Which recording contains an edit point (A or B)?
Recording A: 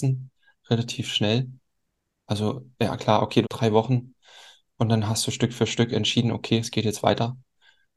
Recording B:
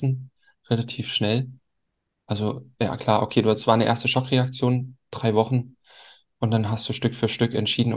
A